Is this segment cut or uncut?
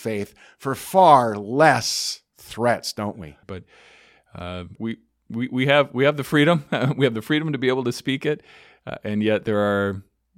cut